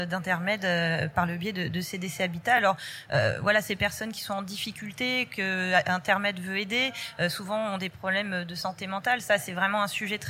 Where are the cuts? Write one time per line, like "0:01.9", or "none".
none